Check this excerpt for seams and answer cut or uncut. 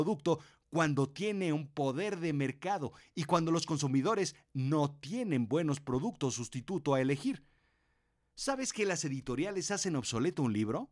uncut